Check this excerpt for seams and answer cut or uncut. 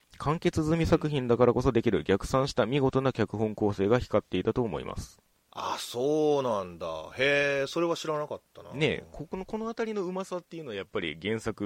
uncut